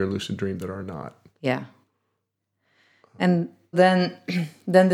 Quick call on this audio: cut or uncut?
cut